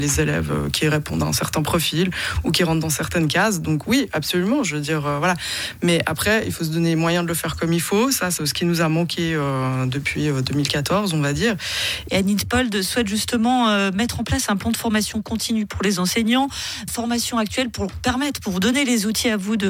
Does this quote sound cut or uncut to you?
cut